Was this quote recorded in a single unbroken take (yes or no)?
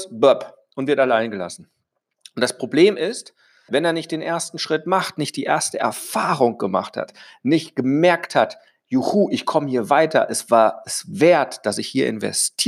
no